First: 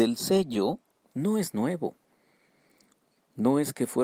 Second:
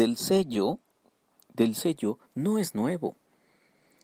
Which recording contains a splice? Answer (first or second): first